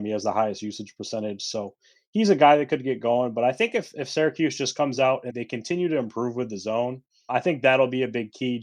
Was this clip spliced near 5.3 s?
yes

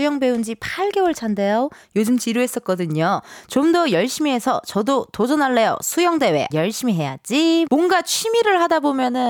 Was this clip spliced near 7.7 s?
yes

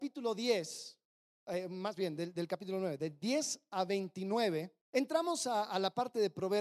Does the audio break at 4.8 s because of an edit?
yes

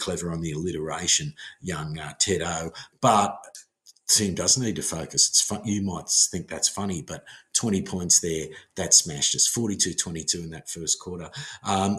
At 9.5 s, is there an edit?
no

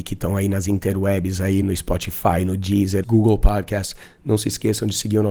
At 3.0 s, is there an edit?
yes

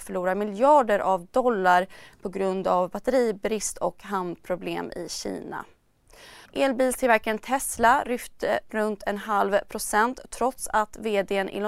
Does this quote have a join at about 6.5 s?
yes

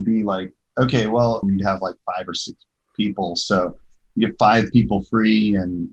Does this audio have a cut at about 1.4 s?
yes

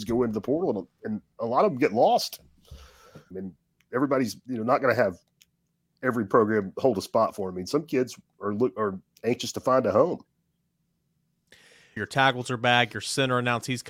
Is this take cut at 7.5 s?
no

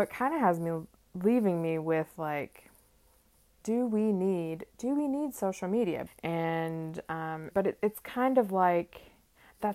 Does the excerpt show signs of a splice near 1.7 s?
no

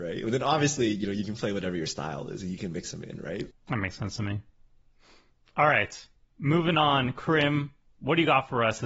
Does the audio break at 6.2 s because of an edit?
no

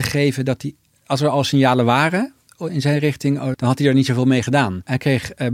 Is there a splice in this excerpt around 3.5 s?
yes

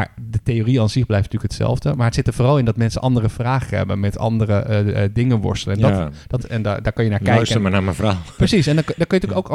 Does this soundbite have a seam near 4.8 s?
no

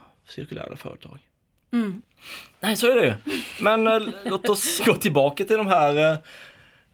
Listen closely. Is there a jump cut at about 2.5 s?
yes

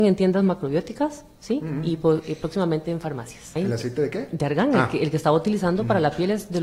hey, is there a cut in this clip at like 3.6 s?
yes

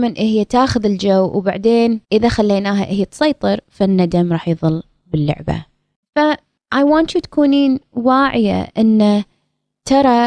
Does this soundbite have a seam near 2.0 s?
yes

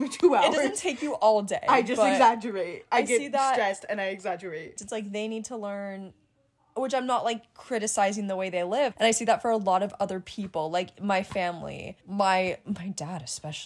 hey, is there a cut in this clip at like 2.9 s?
no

